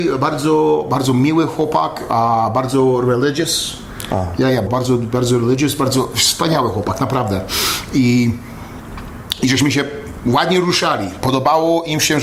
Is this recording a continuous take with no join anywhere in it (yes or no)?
no